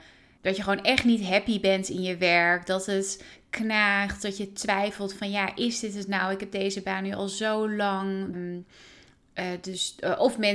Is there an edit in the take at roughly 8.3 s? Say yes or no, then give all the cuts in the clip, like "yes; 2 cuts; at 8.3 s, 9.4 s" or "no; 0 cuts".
yes; 1 cut; at 8.3 s